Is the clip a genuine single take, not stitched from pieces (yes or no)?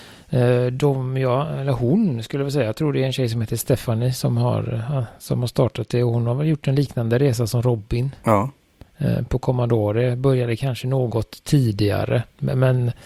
yes